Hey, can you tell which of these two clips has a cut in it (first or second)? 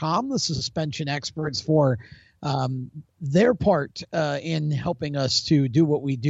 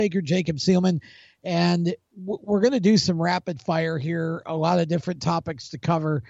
second